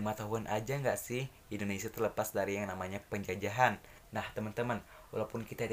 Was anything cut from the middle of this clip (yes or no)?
yes